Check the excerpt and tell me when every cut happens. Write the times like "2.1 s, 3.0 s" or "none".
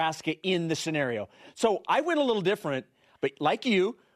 3.1 s

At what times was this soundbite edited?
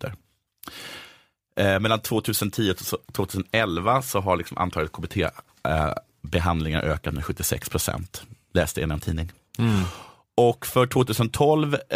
none

